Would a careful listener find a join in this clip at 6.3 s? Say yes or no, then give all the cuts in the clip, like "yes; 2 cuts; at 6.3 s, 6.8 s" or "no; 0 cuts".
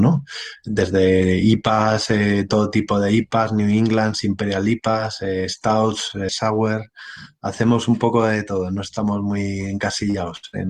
yes; 1 cut; at 6.3 s